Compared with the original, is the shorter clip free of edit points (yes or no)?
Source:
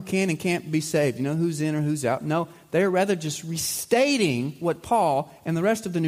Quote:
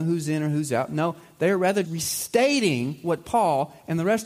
no